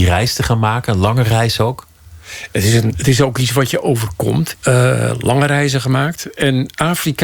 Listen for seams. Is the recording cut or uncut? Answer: cut